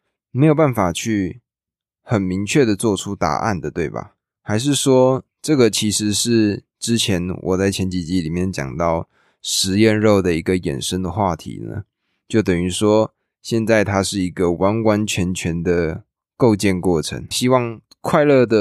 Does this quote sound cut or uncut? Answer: cut